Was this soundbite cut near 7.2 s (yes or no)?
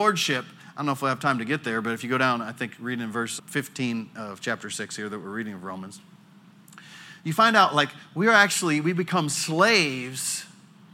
no